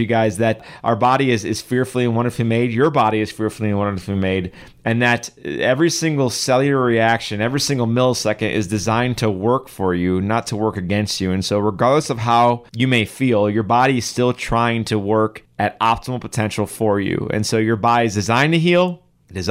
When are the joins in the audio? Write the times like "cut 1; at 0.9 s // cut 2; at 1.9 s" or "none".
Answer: none